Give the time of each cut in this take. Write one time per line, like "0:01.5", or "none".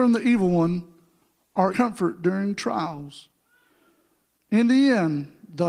0:01.7